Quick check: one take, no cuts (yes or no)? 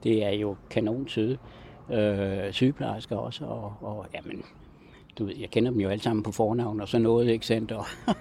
yes